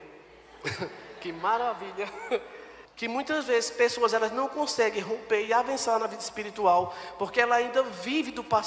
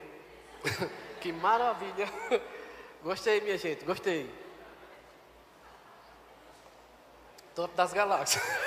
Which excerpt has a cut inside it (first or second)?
first